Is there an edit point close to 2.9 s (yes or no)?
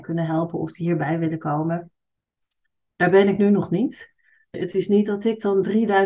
no